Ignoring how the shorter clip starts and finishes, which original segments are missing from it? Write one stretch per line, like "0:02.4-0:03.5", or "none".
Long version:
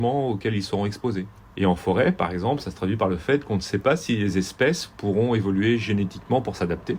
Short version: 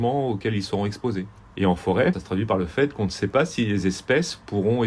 0:02.1-0:02.6